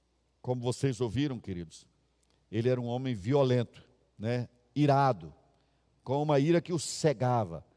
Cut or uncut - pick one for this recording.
uncut